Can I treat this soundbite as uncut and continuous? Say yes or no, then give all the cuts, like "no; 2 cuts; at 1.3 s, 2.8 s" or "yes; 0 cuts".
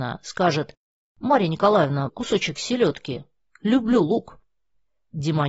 no; 1 cut; at 2.1 s